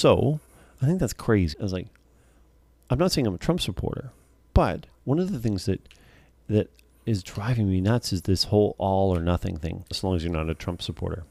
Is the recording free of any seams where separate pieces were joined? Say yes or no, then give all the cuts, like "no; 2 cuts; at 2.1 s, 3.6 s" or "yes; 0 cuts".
no; 2 cuts; at 1.5 s, 9.9 s